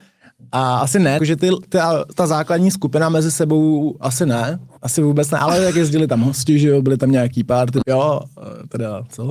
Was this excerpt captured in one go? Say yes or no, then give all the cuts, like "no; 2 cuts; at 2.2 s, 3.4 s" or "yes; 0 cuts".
no; 3 cuts; at 1.2 s, 4.8 s, 7.8 s